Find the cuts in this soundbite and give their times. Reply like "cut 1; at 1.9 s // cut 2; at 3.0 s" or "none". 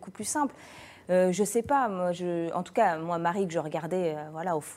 none